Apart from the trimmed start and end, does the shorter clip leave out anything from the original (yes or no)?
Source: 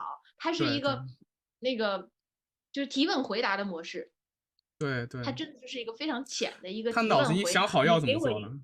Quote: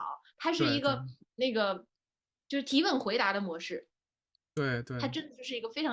yes